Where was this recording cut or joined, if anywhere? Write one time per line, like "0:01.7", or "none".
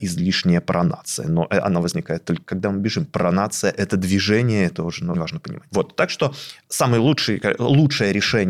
0:05.1